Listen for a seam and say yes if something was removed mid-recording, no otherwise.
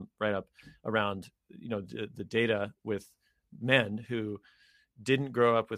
no